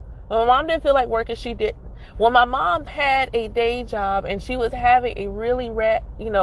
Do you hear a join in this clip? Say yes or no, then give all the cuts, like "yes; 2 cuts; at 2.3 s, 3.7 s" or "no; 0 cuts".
yes; 1 cut; at 2.9 s